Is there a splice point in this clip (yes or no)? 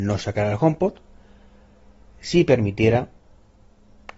no